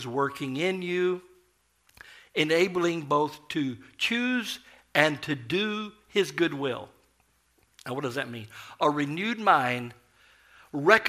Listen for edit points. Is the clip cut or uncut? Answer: uncut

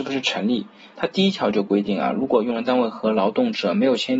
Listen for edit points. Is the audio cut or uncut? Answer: cut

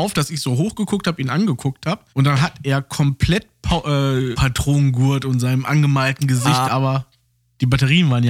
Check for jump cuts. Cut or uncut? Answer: cut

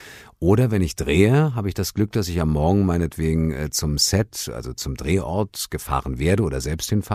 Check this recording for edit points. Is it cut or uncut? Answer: uncut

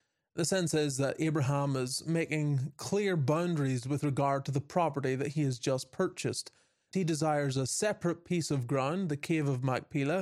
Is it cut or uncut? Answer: cut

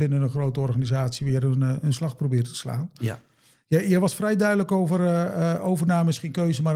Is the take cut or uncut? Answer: uncut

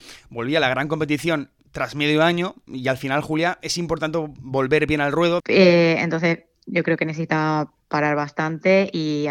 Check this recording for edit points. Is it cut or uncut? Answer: cut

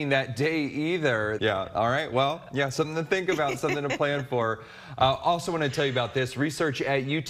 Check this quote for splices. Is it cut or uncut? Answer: cut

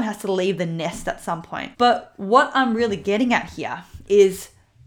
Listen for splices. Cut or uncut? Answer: cut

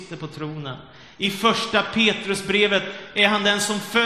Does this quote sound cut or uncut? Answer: uncut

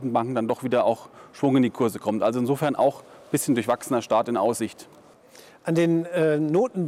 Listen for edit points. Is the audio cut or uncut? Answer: uncut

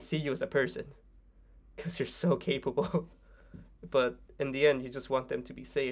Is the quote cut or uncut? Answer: uncut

